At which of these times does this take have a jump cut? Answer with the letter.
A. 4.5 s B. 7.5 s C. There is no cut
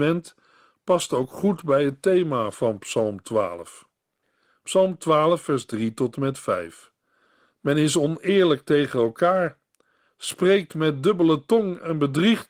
C